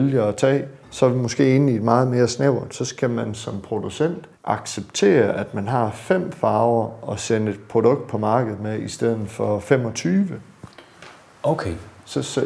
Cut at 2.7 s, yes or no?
no